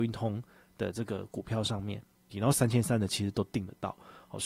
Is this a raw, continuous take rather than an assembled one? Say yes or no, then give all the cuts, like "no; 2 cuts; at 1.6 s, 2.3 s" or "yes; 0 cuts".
no; 1 cut; at 2.3 s